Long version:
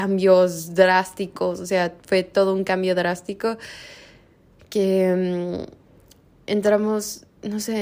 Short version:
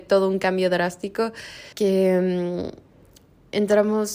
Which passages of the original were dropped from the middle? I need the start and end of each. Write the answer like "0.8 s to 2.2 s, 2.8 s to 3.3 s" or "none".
4.0 s to 4.7 s